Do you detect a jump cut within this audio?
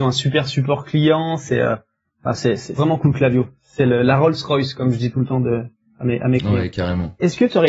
no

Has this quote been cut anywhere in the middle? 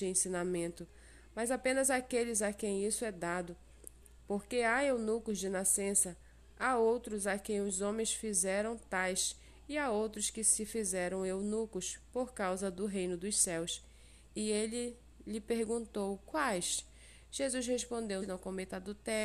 yes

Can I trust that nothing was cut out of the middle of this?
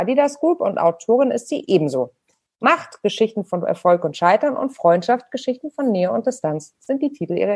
yes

